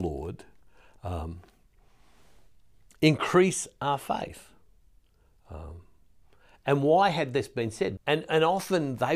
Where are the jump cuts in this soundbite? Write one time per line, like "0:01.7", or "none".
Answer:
0:08.0